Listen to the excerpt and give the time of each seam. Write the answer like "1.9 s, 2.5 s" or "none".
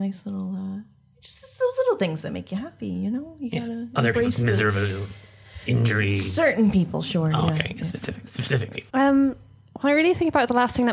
8.9 s